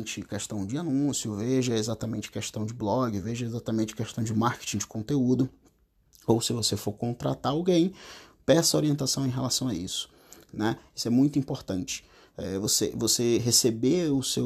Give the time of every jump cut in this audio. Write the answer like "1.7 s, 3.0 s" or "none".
none